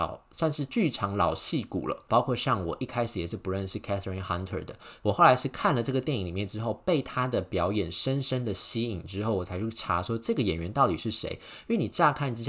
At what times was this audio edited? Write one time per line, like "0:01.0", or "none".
0:02.1